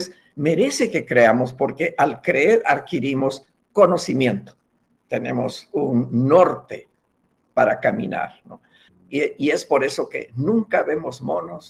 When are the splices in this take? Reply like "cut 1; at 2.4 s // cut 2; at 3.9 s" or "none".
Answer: cut 1; at 5.1 s // cut 2; at 8.9 s